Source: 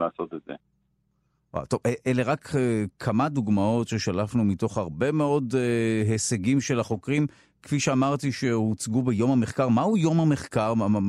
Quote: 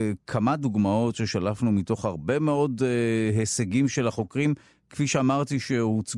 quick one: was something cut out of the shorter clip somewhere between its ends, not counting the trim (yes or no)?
no